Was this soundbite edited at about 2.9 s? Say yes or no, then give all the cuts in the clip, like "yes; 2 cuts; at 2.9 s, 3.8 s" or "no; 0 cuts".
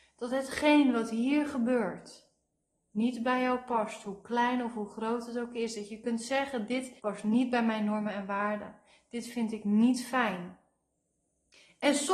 no; 1 cut; at 7.0 s